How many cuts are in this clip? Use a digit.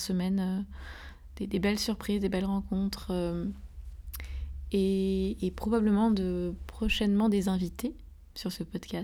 0